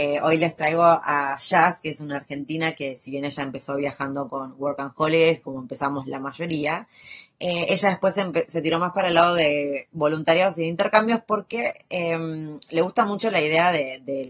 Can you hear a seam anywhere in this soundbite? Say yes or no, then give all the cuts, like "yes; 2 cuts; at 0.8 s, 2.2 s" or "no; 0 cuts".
no; 0 cuts